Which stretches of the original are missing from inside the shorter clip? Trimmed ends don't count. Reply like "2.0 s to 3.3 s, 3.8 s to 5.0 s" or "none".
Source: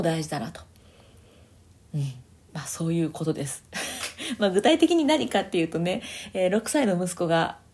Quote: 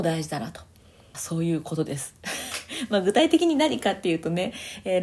1.1 s to 2.6 s